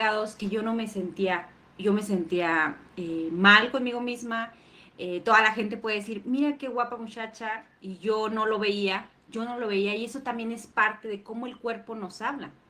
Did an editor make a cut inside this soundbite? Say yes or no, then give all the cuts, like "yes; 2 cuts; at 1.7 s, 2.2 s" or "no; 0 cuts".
no; 0 cuts